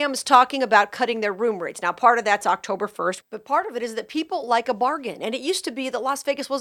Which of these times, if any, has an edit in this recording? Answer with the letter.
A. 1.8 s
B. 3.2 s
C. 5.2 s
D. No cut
B